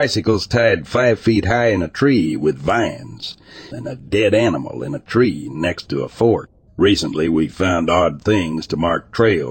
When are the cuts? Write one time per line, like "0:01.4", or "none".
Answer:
0:03.7
0:06.7